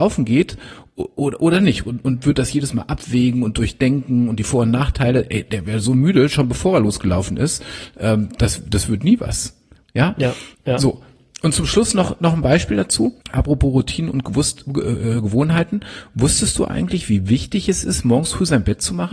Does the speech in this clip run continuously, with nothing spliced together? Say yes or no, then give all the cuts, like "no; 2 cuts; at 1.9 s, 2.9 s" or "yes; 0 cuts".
no; 1 cut; at 13.2 s